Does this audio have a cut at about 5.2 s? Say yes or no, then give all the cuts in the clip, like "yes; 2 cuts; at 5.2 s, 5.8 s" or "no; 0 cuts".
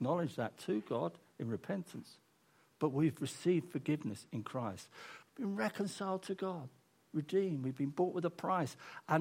yes; 1 cut; at 5.2 s